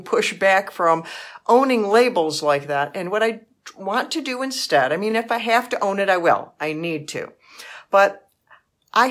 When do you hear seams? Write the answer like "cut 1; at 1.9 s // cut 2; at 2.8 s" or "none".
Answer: none